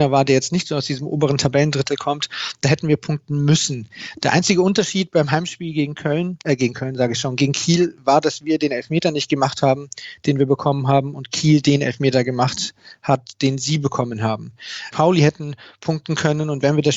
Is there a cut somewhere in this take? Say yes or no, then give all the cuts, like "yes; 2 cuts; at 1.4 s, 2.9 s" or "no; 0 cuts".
yes; 1 cut; at 14.9 s